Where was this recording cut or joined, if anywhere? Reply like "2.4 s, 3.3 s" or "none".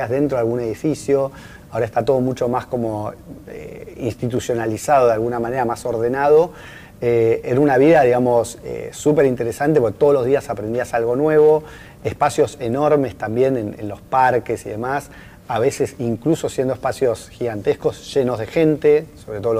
1.6 s